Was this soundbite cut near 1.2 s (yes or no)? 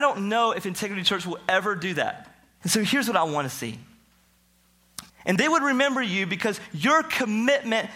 no